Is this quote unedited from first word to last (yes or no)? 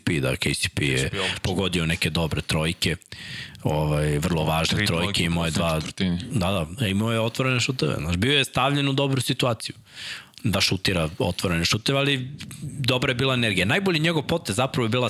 yes